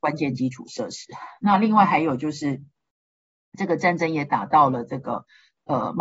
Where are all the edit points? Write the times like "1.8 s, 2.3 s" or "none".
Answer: none